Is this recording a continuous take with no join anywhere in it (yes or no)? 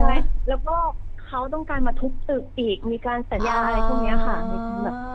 no